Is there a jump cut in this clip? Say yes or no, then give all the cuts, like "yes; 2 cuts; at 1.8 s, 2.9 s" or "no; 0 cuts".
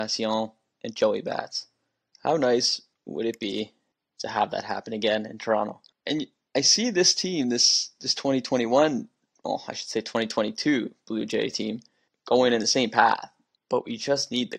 yes; 1 cut; at 2.1 s